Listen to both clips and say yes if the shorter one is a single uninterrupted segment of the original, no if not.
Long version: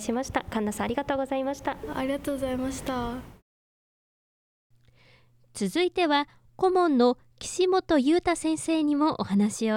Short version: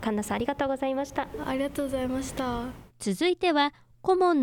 no